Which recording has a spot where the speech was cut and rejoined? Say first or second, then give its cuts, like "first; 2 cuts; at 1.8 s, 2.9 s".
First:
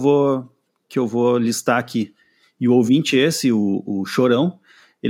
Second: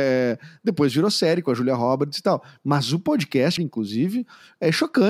second; 1 cut; at 3.6 s